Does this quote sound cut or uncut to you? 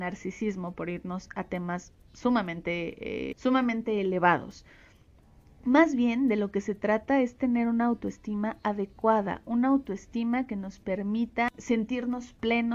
cut